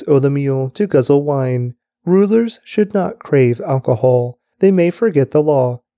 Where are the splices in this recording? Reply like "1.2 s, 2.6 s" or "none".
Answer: 4.5 s